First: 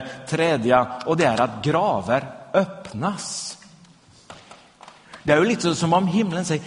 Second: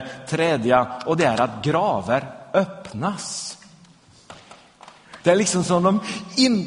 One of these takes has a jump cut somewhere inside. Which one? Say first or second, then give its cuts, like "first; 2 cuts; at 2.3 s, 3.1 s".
second; 1 cut; at 5.2 s